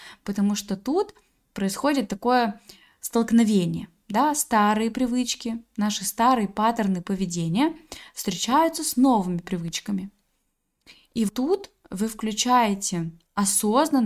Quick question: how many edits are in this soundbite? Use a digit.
1